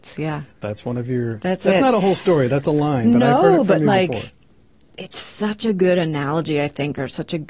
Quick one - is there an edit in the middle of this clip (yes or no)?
no